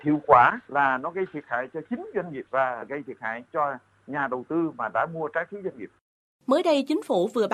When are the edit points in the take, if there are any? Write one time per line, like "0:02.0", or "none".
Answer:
none

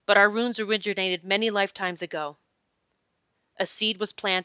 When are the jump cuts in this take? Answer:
none

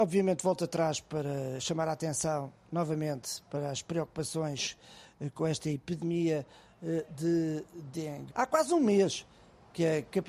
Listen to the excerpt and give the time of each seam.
0:08.3

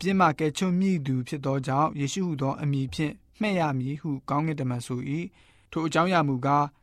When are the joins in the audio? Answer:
none

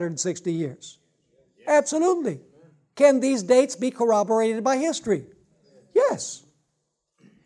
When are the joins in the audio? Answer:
none

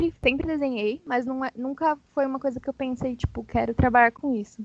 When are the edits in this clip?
none

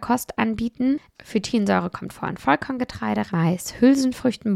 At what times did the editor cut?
0:01.1
0:03.3

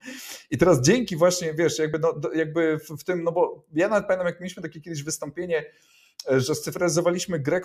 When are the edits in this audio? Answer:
none

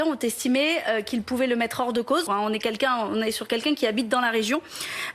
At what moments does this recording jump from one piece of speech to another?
0:02.3

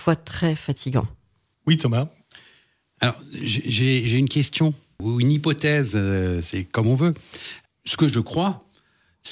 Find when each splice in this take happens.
none

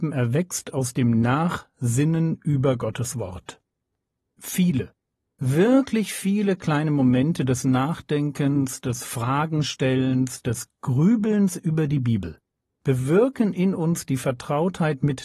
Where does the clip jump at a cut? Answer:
none

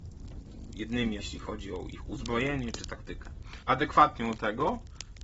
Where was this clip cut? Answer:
0:01.2
0:03.6

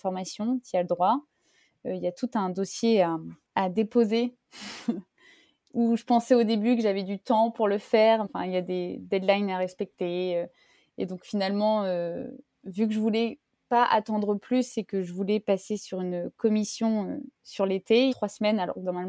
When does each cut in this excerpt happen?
0:08.2
0:18.1

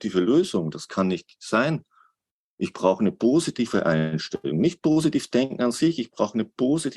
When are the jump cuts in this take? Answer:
none

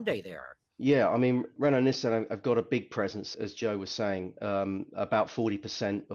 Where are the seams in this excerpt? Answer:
0:01.6
0:03.3

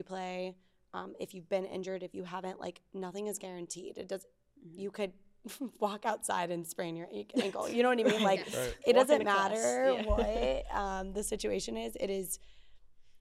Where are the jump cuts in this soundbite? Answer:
none

